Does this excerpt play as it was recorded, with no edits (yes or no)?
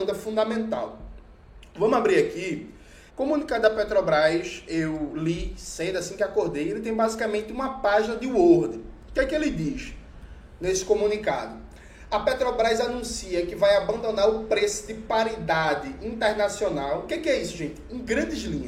no